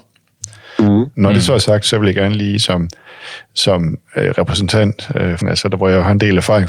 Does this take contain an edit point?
yes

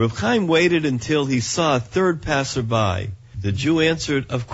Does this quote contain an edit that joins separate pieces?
yes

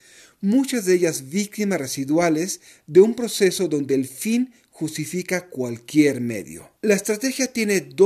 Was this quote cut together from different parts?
yes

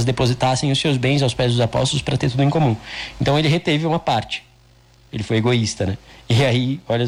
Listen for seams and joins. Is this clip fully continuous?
yes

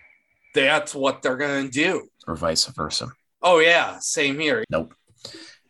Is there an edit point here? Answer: yes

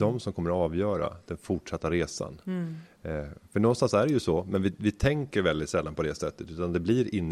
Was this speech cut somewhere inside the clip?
no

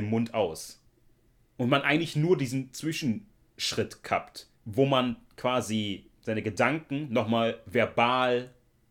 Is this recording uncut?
no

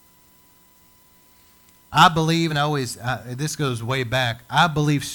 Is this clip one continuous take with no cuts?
yes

